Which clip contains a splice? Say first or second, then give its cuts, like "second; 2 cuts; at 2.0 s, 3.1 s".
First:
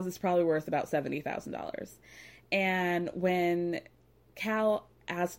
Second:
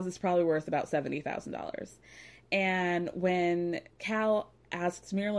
second; 1 cut; at 3.9 s